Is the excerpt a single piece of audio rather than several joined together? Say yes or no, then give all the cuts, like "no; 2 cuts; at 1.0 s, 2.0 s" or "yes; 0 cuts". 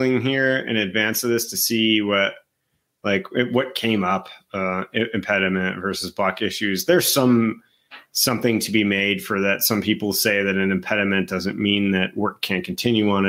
yes; 0 cuts